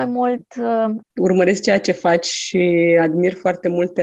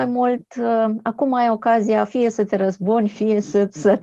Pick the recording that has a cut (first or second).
first